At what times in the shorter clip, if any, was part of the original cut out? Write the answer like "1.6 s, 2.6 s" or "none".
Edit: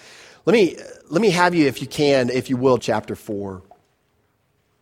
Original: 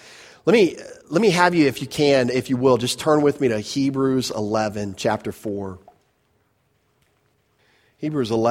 2.8 s